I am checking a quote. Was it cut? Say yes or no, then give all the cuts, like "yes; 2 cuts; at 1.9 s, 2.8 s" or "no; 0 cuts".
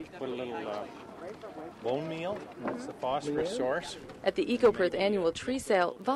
no; 0 cuts